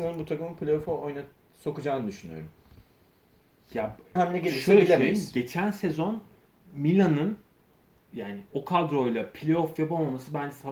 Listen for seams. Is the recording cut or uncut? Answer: cut